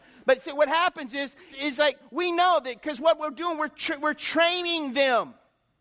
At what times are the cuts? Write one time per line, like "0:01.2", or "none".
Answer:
0:01.5